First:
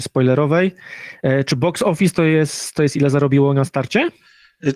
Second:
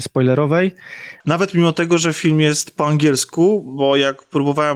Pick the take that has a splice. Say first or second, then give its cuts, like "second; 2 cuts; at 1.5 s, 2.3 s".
second; 1 cut; at 1.2 s